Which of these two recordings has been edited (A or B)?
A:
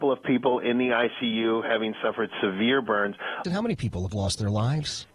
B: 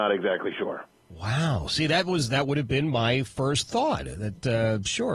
A